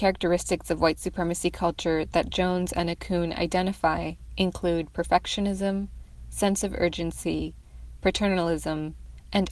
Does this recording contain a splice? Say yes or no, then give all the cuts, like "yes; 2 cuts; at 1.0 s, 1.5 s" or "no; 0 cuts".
no; 0 cuts